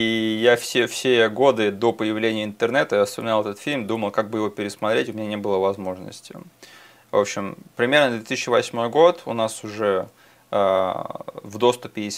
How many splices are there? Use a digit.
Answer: 0